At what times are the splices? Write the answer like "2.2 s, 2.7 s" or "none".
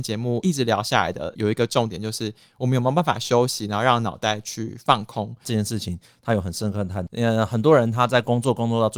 5.4 s, 7.1 s

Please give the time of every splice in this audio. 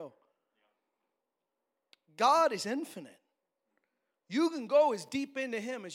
none

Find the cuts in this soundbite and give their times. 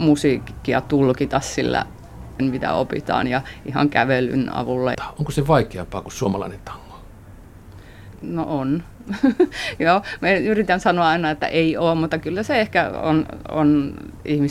2.4 s, 4.9 s

